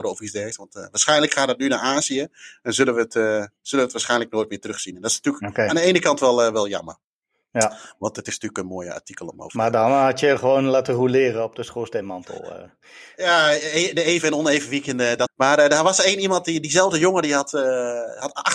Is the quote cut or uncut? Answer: cut